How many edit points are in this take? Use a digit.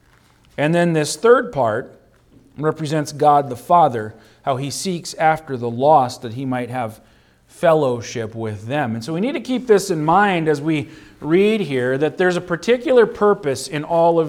0